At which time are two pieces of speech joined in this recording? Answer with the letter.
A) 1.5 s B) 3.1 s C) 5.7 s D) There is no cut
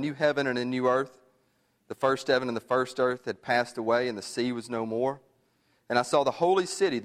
D